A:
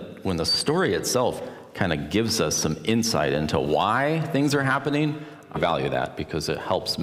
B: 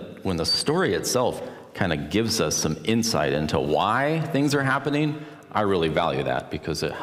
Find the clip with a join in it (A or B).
A